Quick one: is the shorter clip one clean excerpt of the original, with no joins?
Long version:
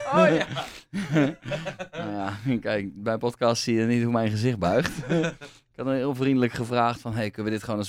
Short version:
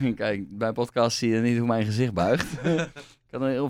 yes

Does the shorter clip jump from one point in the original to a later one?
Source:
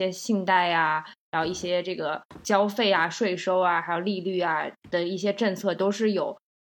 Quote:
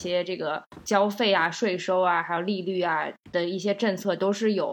no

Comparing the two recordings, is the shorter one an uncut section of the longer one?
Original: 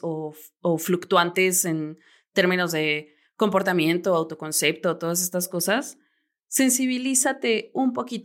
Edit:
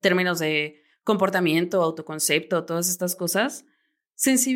yes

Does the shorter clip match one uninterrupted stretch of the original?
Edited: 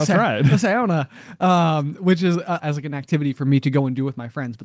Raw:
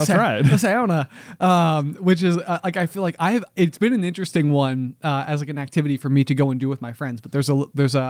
no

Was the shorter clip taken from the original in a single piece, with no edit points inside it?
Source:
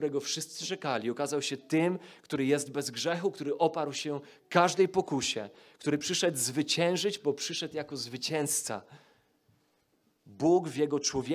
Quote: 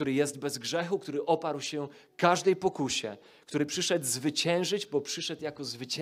yes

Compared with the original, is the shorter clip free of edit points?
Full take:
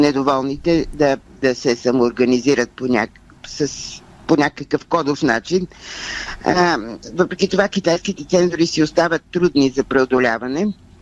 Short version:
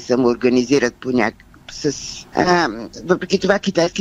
no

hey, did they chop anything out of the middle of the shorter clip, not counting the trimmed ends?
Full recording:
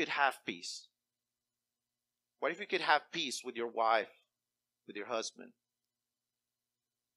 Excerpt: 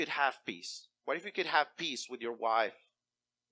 yes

